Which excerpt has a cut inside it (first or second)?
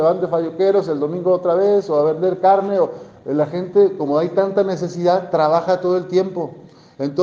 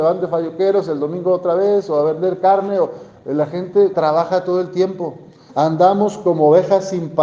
second